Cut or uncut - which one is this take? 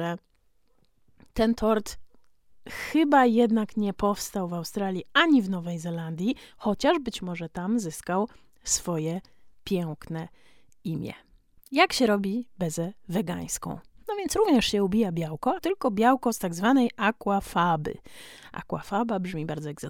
cut